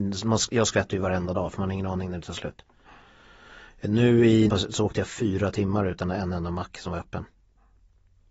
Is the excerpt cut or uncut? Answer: cut